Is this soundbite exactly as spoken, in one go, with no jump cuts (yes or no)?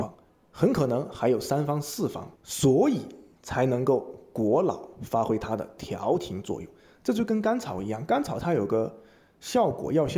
no